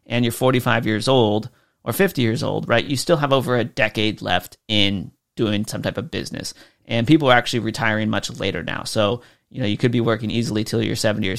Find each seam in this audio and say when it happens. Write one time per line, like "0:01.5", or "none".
none